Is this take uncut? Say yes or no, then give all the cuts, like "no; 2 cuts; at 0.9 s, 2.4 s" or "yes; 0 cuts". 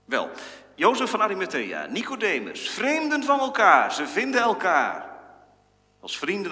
yes; 0 cuts